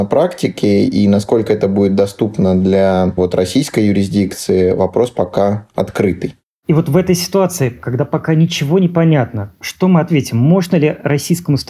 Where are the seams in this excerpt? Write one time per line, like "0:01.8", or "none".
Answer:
none